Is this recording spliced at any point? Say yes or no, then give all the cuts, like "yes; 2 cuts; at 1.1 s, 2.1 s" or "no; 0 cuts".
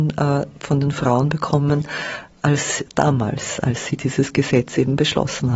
no; 0 cuts